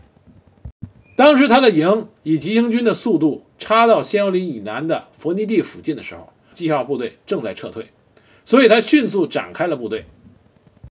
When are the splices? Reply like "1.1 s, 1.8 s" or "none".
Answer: 6.5 s